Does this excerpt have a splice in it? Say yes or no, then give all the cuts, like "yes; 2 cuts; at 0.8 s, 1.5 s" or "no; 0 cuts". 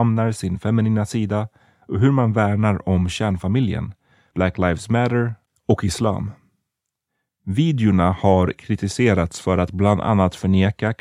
yes; 1 cut; at 4.3 s